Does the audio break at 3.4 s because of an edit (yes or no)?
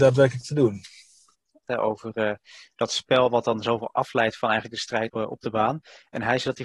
no